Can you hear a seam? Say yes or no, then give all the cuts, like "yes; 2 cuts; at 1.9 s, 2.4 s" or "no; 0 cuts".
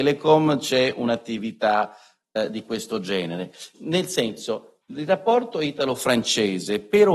yes; 1 cut; at 3.7 s